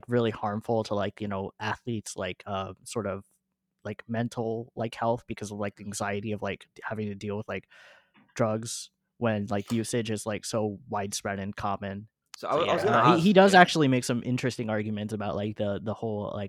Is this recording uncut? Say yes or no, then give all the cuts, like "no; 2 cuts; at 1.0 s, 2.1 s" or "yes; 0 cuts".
no; 1 cut; at 12.2 s